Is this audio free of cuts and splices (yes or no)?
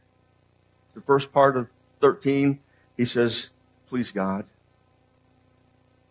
no